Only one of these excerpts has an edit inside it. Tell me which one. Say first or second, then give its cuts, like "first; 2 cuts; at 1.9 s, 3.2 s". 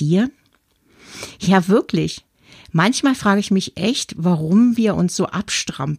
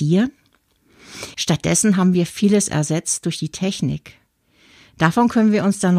second; 1 cut; at 1.3 s